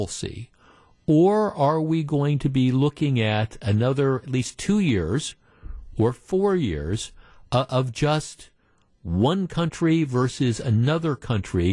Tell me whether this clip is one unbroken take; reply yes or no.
yes